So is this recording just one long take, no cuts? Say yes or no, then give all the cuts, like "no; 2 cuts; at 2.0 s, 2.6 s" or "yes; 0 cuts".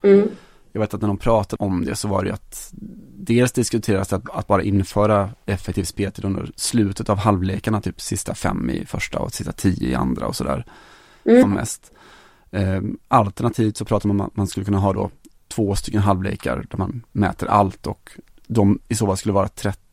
no; 2 cuts; at 1.6 s, 11.4 s